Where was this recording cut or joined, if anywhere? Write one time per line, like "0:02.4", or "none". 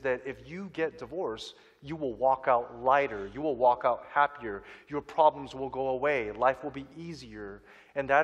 none